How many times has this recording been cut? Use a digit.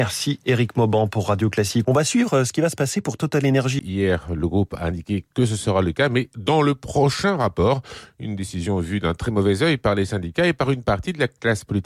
2